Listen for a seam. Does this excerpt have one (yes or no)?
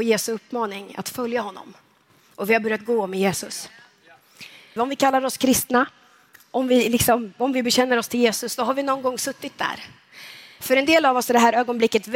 yes